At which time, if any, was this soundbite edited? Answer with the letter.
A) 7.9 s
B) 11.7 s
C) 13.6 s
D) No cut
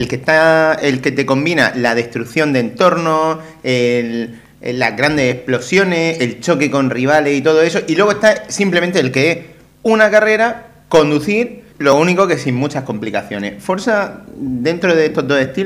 B